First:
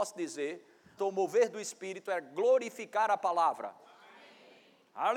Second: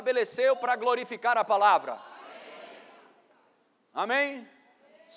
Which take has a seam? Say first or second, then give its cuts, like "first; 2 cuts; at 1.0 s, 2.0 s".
first; 1 cut; at 1.0 s